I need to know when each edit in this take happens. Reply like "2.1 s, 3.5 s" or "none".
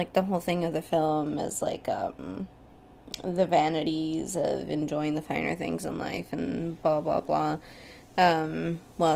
none